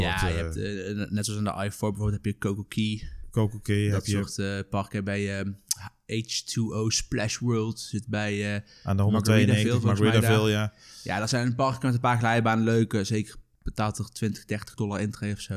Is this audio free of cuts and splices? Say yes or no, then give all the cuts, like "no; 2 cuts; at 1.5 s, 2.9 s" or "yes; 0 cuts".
yes; 0 cuts